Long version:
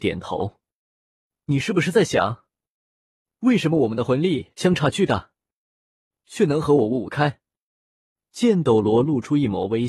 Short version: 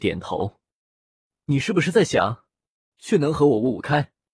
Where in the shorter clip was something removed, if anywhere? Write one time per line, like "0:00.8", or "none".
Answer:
0:02.9